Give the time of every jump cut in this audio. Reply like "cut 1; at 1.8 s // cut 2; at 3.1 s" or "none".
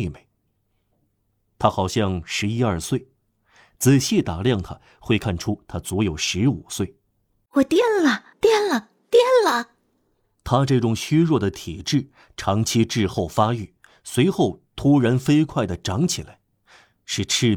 cut 1; at 7.5 s